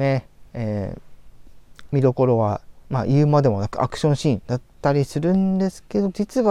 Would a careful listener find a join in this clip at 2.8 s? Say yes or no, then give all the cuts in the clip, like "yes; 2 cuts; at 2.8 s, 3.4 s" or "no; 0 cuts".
yes; 1 cut; at 2.8 s